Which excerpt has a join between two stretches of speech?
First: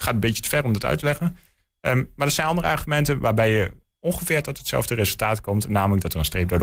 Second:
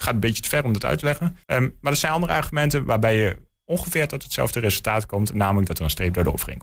second; 1 cut; at 1.4 s

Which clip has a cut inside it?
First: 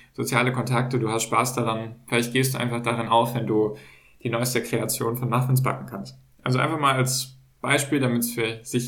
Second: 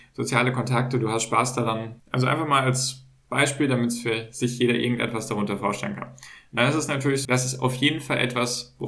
second; 2 cuts; at 2.0 s, 7.2 s

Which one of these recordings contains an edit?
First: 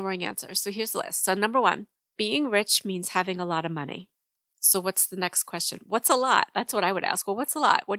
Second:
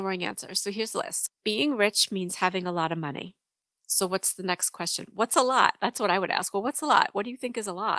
second; 1 cut; at 1.3 s

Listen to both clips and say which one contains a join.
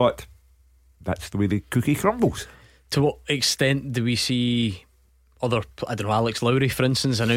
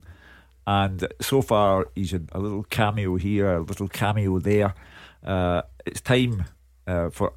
second; 1 cut; at 2.3 s

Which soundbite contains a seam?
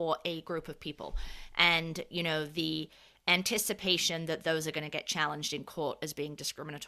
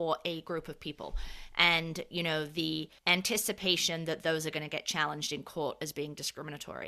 second; 1 cut; at 3.0 s

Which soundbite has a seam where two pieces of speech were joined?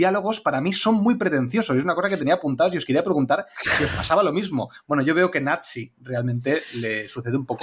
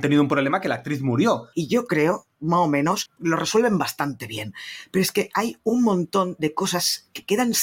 second; 2 cuts; at 1.5 s, 3.2 s

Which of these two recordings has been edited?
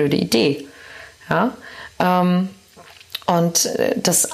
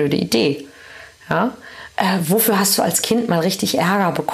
second; 1 cut; at 1.9 s

